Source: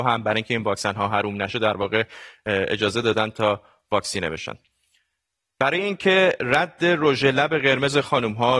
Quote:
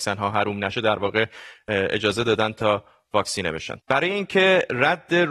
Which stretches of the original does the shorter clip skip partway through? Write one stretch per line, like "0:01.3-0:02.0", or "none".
0:04.6-0:05.5